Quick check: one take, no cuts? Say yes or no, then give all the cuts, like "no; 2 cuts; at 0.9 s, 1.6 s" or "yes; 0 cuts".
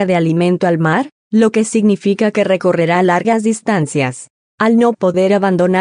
no; 1 cut; at 4.4 s